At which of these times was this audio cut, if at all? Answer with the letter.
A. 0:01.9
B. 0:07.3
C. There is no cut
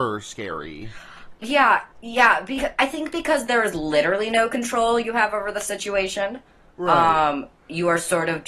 A